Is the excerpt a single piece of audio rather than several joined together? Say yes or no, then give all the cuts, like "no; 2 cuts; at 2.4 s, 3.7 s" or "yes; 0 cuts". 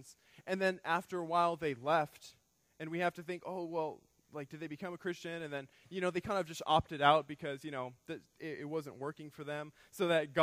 yes; 0 cuts